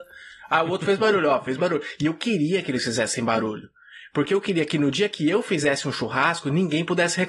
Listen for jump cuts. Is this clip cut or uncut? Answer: uncut